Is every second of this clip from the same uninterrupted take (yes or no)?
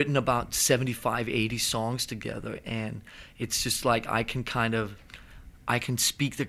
yes